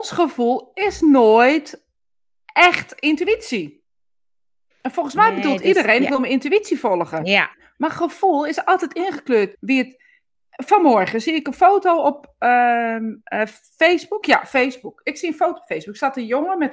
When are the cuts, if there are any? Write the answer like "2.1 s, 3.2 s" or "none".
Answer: 9.5 s, 14.2 s